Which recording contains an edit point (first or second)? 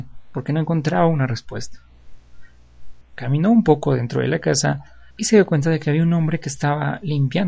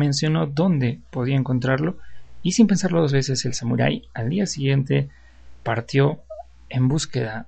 first